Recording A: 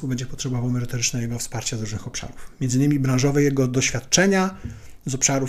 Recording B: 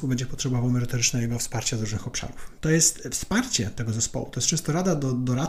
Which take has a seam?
B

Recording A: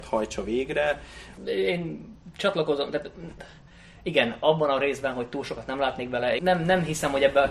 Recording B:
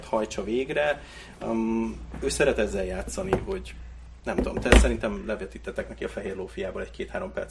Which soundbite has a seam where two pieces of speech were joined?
A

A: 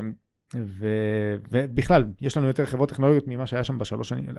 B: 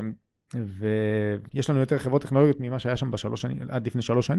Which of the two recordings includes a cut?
B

